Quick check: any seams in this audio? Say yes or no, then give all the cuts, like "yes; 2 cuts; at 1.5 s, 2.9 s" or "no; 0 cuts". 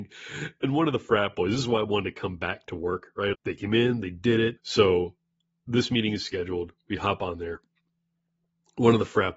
yes; 2 cuts; at 3.3 s, 4.6 s